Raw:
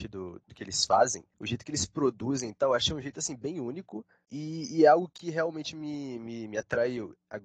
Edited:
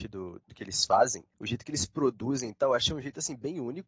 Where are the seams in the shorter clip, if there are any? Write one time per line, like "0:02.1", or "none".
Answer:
none